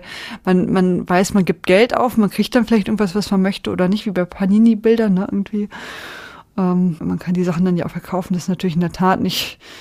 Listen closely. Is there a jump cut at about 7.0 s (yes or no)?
yes